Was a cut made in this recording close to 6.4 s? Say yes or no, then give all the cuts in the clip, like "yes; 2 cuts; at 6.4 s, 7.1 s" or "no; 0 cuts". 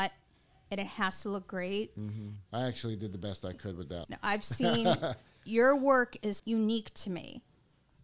yes; 3 cuts; at 2.5 s, 4.0 s, 6.4 s